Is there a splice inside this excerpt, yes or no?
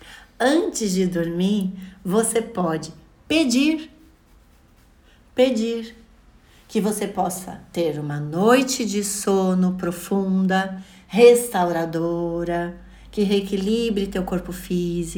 no